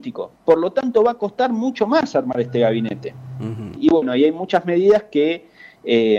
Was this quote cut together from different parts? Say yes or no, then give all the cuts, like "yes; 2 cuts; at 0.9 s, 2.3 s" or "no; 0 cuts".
yes; 1 cut; at 3.8 s